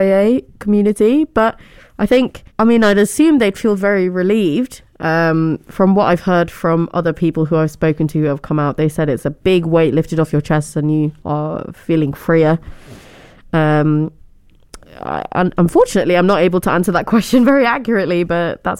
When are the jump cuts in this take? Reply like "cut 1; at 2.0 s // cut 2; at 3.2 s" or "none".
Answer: cut 1; at 2.5 s